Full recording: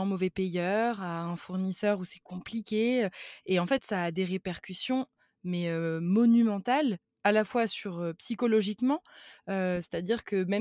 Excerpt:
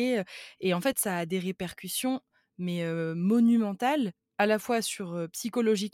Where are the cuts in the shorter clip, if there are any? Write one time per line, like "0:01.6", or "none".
none